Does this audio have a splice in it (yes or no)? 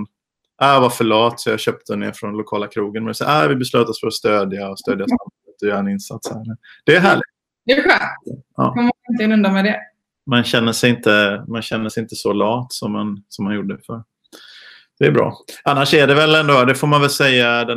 no